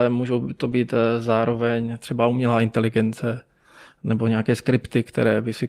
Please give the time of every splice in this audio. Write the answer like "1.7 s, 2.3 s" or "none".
none